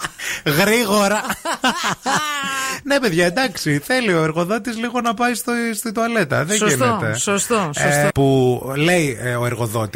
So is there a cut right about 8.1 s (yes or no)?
yes